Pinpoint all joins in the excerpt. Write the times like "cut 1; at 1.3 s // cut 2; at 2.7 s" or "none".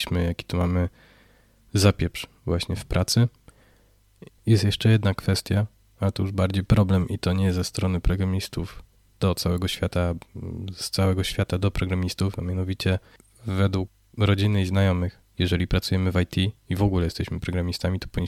cut 1; at 4.3 s // cut 2; at 15.2 s // cut 3; at 16.6 s